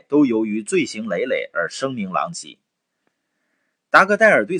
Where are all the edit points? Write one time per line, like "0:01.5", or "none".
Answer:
none